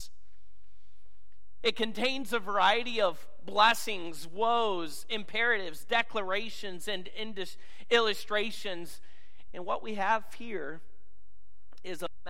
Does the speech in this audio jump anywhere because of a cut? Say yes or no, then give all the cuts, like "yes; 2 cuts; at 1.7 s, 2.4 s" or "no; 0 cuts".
yes; 2 cuts; at 1.6 s, 9.5 s